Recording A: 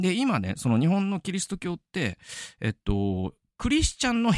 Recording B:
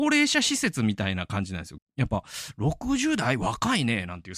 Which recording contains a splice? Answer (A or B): B